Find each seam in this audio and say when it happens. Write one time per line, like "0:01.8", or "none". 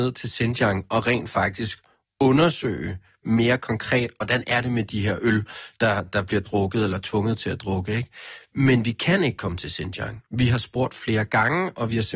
0:06.0